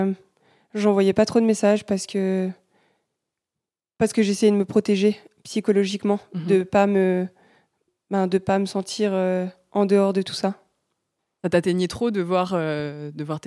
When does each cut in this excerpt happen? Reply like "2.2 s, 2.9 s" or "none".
none

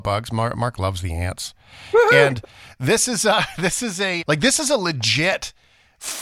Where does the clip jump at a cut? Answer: 4.2 s

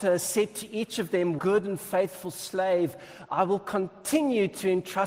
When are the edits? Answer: 1.4 s, 3.3 s

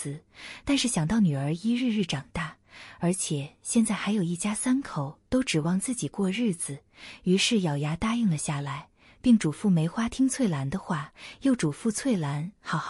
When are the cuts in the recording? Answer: none

